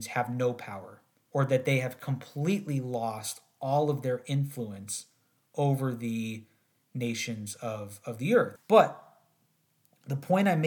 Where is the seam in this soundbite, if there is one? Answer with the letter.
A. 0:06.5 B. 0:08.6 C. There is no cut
B